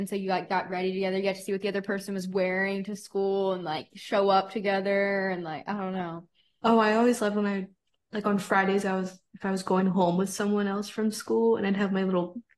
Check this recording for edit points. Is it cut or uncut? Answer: uncut